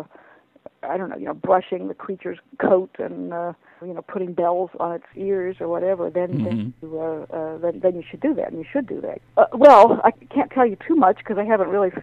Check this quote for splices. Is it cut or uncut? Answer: cut